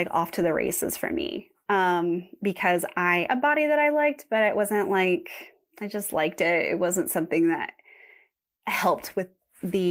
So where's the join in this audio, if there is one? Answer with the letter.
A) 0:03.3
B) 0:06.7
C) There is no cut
A